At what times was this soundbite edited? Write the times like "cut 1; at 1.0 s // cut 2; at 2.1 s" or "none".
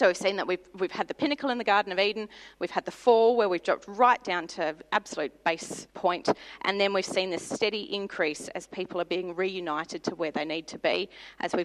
cut 1; at 5.9 s